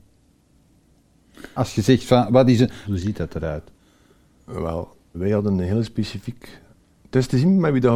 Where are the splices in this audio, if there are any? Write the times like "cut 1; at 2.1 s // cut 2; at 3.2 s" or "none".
cut 1; at 1.6 s // cut 2; at 2.8 s // cut 3; at 5.1 s